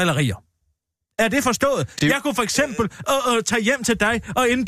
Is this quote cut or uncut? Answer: uncut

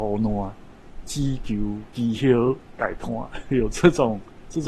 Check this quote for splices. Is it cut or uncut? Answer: cut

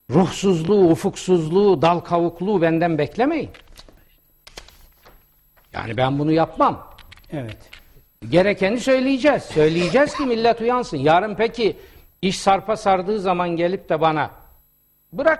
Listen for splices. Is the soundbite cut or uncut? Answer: uncut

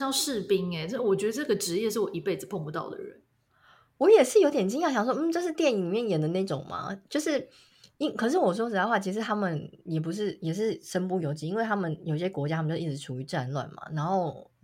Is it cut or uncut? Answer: uncut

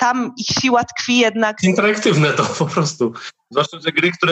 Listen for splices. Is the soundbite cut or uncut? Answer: uncut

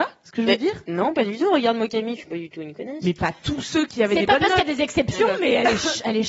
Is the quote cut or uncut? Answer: cut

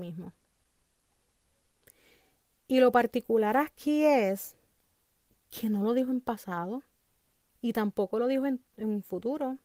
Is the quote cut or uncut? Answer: cut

